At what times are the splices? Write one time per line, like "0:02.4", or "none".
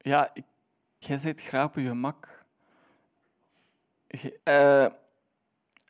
0:01.0
0:04.4